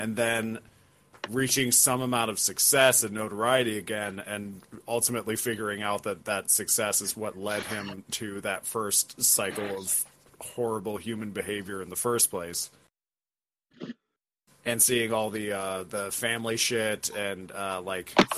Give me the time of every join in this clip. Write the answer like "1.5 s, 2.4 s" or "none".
none